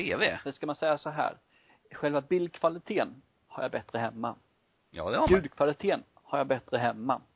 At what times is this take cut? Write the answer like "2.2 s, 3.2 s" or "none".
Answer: none